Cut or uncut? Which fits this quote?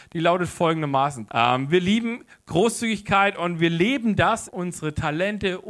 cut